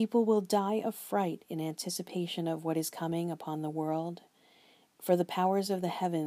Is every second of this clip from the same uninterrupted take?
yes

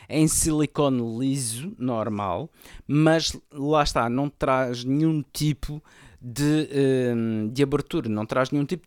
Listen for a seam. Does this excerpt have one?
no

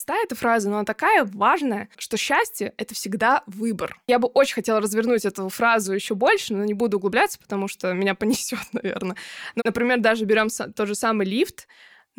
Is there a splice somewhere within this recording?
yes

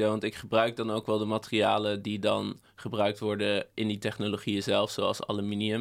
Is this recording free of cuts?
yes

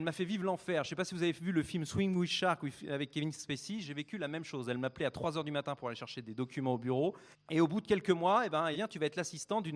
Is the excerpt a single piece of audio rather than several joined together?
no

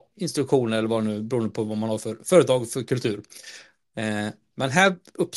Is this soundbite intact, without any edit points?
yes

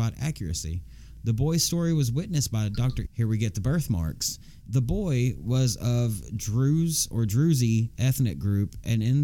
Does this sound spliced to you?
yes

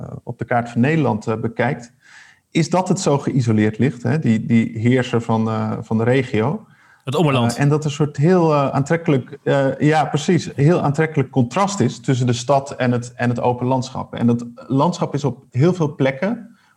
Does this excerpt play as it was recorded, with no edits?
yes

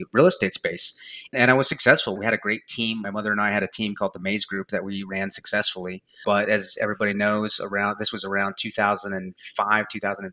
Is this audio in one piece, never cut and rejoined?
yes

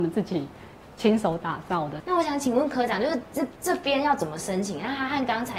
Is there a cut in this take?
no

